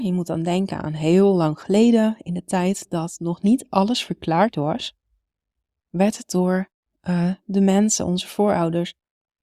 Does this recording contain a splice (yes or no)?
no